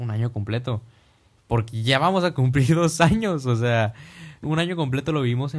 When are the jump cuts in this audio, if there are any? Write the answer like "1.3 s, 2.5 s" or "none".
1.4 s, 4.4 s